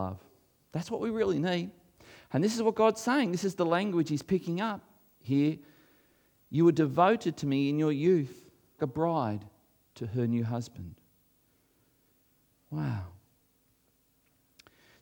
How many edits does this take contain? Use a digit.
1